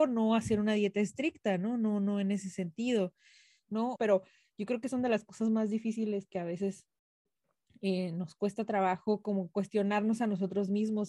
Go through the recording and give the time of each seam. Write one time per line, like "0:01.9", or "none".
0:04.0